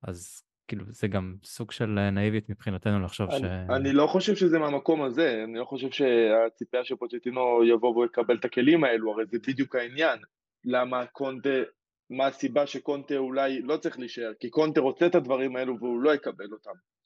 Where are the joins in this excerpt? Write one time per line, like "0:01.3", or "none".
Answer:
none